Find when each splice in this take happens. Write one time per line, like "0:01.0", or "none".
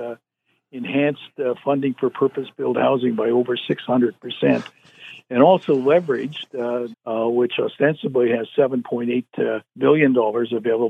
0:06.9
0:09.7